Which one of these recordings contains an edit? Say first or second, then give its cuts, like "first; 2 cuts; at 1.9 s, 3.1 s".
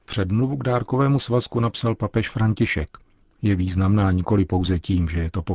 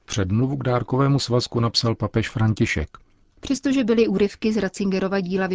second; 1 cut; at 3.3 s